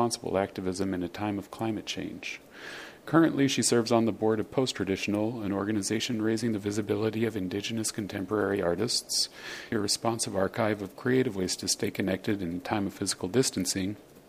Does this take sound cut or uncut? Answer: cut